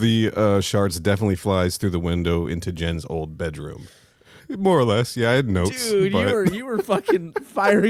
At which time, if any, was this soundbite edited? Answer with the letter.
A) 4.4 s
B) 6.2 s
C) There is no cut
A